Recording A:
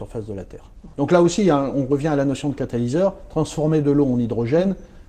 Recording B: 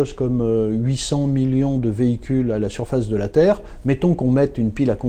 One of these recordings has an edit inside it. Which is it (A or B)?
A